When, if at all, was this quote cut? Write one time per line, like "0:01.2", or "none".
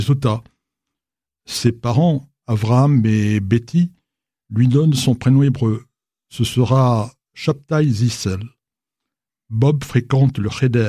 0:09.3